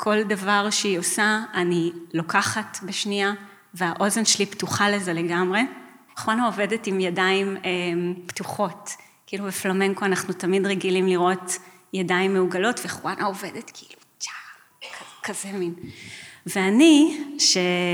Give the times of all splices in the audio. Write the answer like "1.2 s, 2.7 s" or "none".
6.1 s